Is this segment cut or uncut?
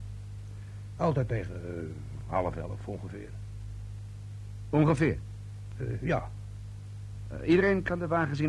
cut